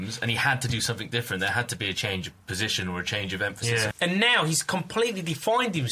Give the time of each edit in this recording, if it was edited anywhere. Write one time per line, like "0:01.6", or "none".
0:03.9